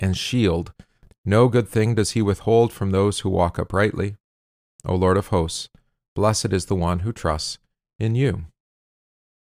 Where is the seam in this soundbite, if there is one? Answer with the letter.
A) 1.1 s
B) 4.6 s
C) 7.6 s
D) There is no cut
A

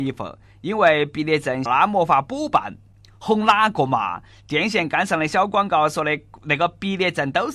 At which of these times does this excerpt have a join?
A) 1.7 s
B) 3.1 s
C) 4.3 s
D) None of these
A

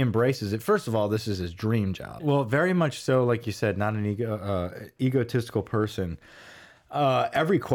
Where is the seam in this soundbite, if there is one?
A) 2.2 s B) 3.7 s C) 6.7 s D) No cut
A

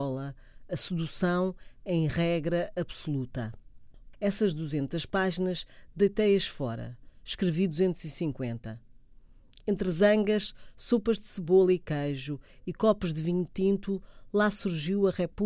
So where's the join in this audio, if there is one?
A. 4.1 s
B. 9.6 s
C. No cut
A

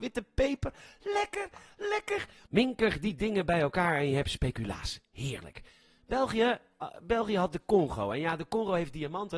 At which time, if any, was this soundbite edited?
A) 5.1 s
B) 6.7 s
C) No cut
C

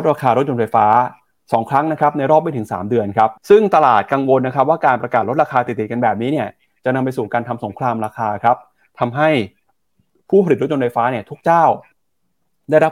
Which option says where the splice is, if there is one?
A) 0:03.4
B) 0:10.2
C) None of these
A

